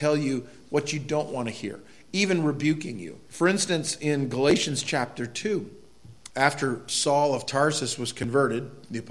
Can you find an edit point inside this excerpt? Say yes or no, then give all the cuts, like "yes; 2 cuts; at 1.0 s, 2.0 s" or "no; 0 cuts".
yes; 2 cuts; at 3.3 s, 6.3 s